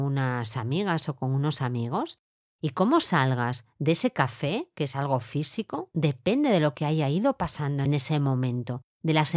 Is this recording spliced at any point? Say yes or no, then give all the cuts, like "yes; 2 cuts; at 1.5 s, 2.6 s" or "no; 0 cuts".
no; 0 cuts